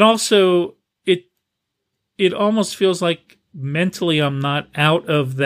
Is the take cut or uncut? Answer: cut